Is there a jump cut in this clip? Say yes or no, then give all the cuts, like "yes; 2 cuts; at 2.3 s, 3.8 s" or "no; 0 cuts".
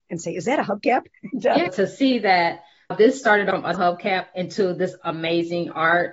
no; 0 cuts